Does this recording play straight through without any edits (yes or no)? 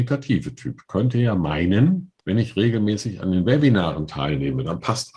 no